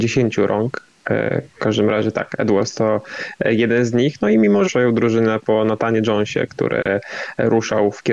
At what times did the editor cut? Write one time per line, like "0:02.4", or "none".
0:04.6